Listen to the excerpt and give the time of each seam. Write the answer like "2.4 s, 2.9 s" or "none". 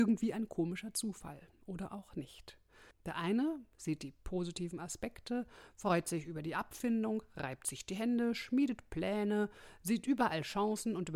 2.9 s